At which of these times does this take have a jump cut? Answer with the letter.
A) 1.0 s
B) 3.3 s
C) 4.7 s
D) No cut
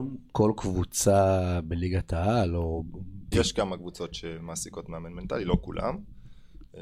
B